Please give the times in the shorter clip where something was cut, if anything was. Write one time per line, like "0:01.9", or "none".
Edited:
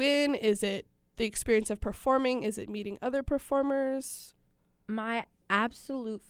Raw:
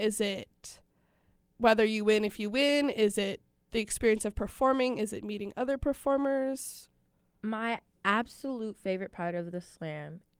none